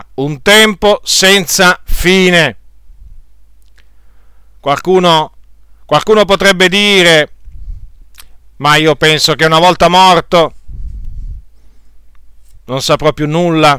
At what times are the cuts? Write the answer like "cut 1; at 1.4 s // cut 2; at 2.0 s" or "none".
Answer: cut 1; at 4.6 s // cut 2; at 8.4 s